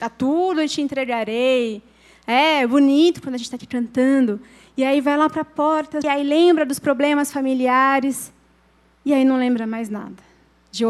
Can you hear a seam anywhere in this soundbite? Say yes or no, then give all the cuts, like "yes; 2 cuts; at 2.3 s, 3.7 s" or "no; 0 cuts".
yes; 1 cut; at 6.0 s